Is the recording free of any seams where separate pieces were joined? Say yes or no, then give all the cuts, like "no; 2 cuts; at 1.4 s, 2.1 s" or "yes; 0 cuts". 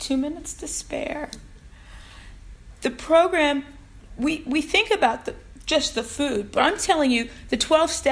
yes; 0 cuts